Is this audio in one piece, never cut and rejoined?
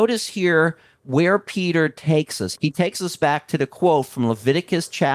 no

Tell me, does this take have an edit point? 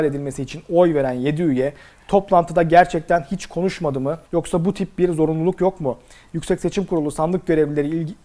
yes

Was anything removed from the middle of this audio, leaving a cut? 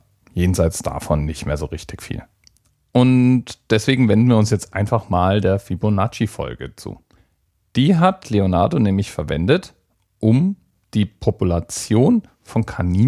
no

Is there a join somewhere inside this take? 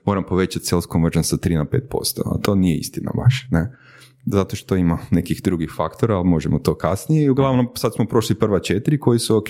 no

